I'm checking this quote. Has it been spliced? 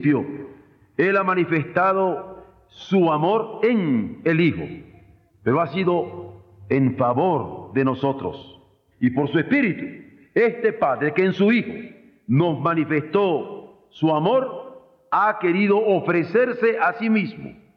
no; 0 cuts

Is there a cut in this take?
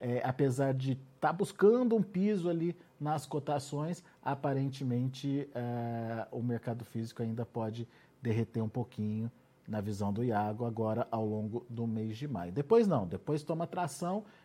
no; 0 cuts

